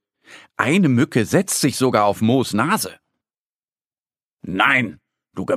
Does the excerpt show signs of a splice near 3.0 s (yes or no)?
no